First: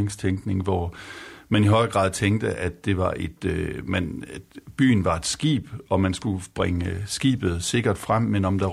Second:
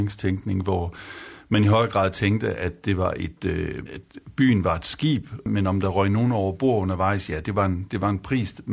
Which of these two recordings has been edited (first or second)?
second